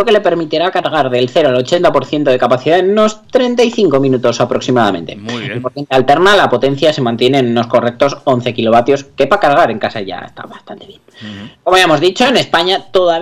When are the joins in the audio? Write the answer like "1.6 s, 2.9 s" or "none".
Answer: none